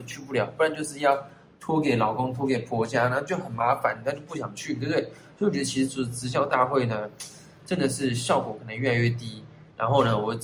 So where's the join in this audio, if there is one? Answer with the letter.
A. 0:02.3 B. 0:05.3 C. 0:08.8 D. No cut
D